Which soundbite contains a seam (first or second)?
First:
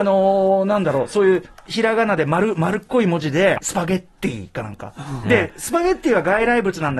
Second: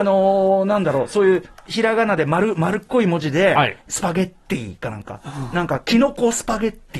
first